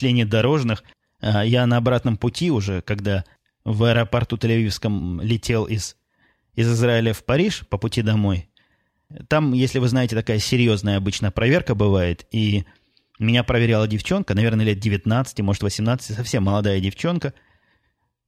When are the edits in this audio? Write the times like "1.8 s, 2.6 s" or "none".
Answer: none